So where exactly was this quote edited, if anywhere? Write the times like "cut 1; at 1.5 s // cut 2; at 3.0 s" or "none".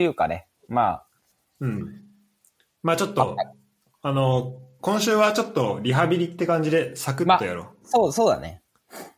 none